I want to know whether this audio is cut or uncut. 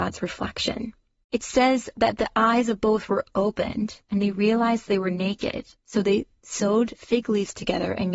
cut